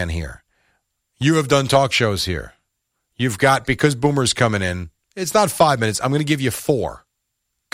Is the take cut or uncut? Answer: uncut